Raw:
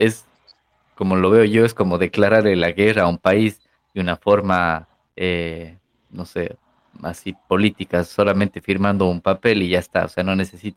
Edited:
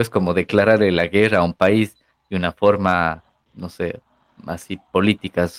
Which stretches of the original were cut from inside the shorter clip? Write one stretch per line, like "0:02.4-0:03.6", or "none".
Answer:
0:05.1-0:06.0